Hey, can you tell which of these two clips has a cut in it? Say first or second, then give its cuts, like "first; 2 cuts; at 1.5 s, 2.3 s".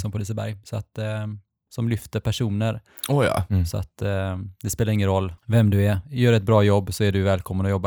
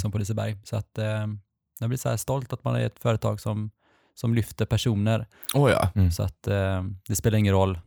first; 2 cuts; at 1.7 s, 5.4 s